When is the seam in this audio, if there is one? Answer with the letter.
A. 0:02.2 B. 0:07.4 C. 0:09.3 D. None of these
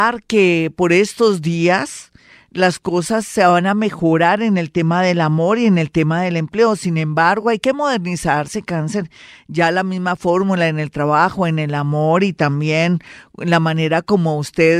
D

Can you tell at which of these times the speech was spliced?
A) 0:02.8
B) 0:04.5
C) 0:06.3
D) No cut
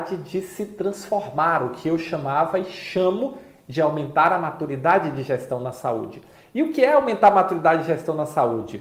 D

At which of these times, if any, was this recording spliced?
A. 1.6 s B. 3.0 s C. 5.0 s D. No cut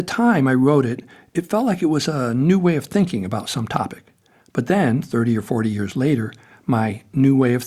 D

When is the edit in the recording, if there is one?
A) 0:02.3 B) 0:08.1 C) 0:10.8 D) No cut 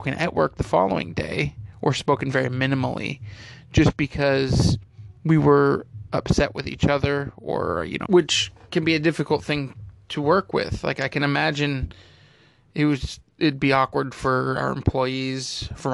B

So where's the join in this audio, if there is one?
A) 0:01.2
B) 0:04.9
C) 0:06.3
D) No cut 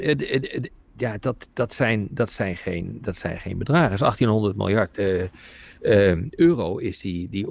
B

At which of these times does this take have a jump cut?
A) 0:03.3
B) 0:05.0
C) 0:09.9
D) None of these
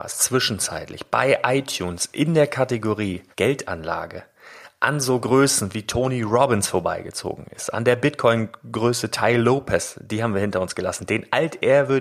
A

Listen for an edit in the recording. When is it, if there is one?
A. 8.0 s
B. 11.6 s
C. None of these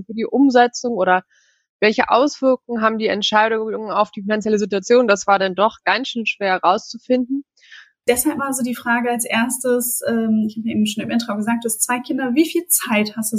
A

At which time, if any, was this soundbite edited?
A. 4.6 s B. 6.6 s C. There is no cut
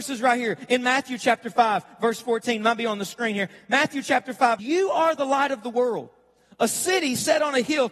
A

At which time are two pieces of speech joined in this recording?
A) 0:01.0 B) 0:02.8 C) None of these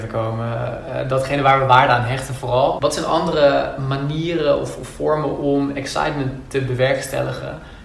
B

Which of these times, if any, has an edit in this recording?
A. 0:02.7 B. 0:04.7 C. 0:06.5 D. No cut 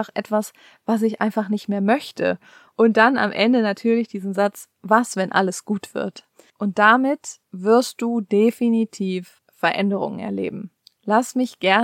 A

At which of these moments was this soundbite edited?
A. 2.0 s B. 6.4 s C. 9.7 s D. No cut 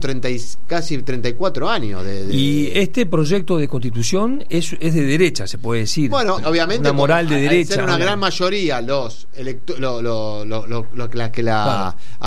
B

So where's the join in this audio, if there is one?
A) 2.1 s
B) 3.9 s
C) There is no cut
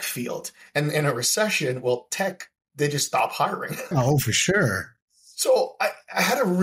B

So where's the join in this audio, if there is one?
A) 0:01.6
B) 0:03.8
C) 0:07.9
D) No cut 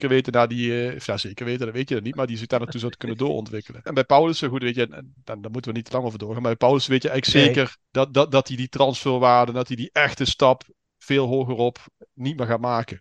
C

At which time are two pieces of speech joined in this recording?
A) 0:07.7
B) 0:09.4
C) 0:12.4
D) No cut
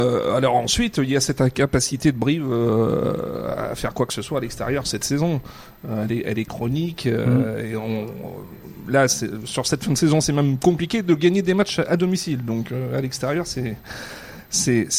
D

